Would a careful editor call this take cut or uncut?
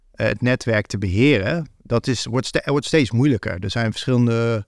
uncut